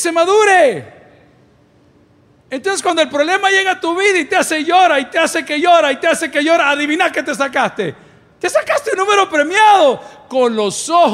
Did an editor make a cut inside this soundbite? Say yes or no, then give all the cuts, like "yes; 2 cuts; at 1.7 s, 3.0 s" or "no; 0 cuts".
no; 0 cuts